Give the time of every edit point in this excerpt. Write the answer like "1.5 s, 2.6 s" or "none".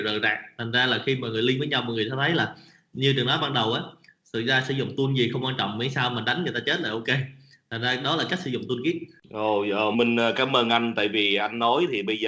9.9 s